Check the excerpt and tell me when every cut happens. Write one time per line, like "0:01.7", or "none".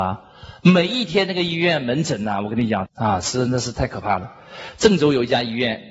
0:02.9